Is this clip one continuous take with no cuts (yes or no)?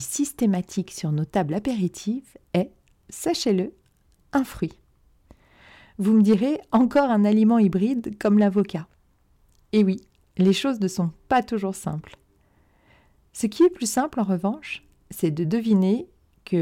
yes